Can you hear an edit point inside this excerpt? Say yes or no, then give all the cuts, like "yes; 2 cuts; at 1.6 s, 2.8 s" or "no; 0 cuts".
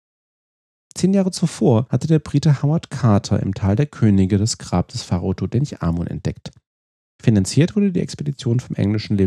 no; 0 cuts